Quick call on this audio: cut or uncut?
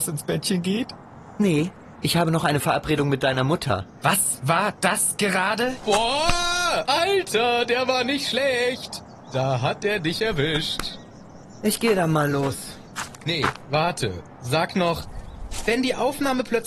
uncut